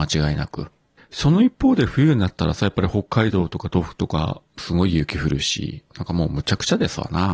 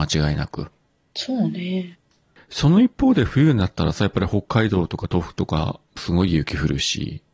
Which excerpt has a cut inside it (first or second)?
first